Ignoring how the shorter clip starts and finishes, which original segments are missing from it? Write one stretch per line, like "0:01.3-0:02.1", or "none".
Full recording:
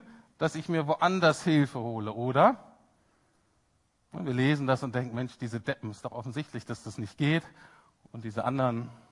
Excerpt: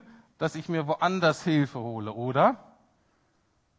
none